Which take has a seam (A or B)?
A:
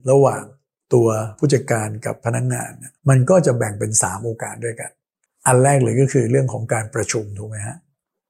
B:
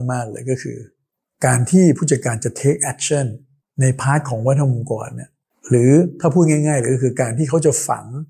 A